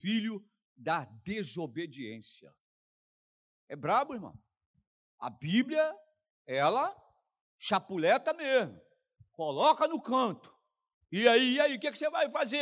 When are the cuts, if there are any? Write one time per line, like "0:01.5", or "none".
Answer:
none